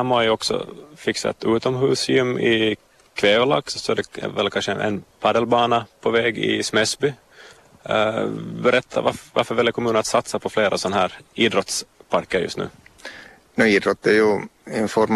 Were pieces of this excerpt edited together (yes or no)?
no